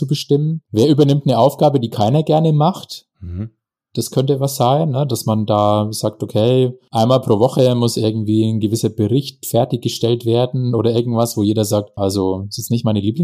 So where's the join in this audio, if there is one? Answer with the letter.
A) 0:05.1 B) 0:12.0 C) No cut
B